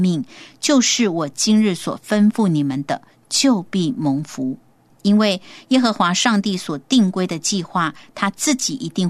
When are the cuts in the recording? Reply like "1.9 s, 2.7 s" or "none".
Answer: 4.9 s